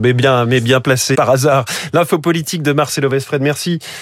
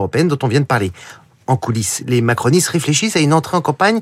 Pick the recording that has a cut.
first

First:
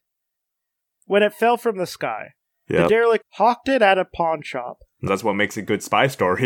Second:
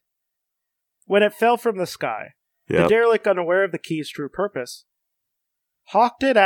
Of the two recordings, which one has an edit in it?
first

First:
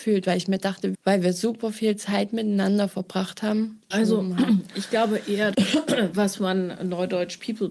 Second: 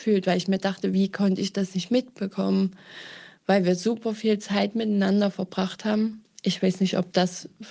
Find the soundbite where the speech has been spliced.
first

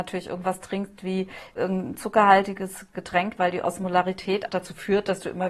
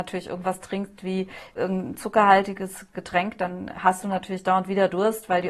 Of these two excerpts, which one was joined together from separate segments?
first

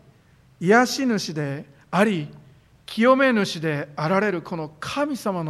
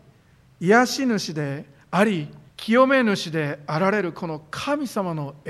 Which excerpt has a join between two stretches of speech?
second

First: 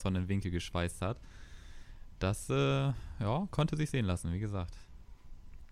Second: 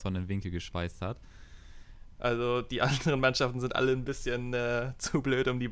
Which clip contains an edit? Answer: second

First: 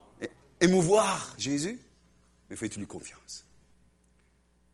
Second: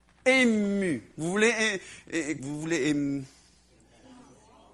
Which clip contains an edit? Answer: second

